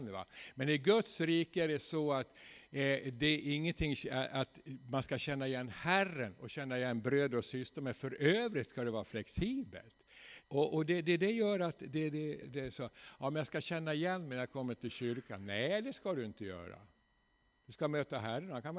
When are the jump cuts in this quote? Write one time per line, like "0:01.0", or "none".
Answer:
0:10.4
0:12.4